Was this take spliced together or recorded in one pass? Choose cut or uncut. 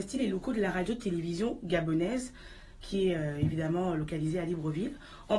uncut